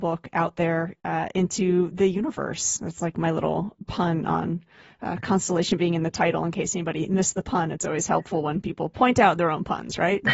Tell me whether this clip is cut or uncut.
uncut